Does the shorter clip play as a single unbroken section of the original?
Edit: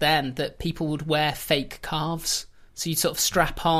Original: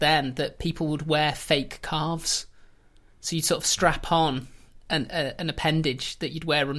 no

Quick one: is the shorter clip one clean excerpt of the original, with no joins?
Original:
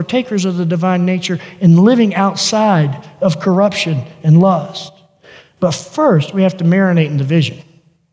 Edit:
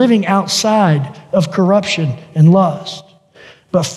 yes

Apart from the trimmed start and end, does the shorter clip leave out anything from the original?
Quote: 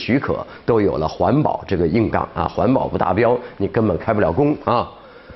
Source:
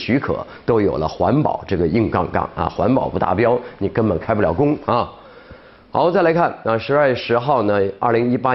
yes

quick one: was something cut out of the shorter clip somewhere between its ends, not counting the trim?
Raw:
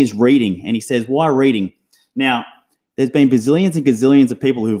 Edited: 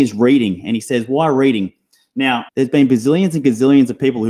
yes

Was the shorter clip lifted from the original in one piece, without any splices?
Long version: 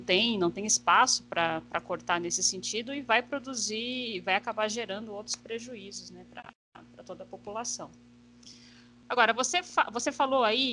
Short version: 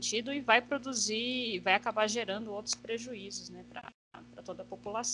yes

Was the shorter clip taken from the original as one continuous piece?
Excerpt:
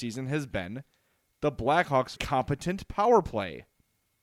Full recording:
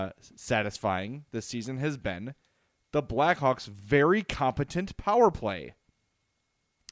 no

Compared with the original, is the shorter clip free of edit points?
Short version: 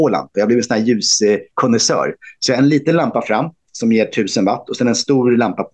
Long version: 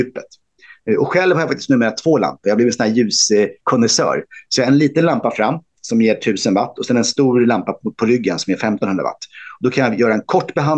yes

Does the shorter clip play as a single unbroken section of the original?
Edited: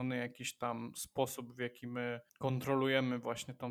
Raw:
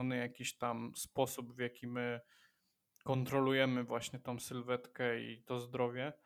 no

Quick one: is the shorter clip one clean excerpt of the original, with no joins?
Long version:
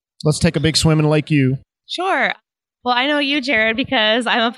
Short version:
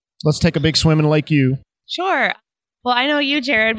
yes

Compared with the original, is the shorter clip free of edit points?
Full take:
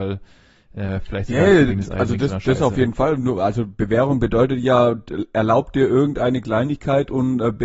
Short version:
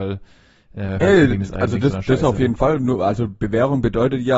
no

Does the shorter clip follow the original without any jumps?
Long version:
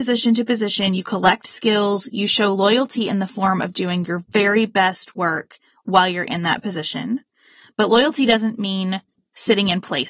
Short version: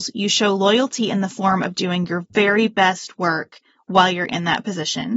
yes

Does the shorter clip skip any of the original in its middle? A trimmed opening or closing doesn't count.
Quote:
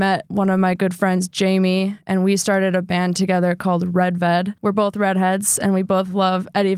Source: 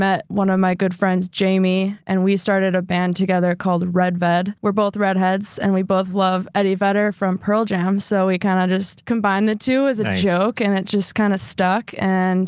no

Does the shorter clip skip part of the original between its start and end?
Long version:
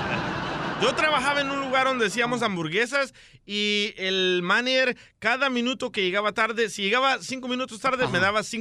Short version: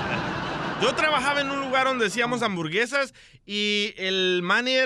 no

